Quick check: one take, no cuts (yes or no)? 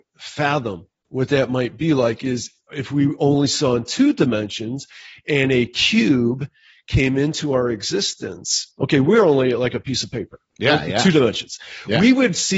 yes